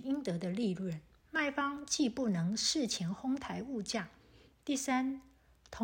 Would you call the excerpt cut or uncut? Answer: cut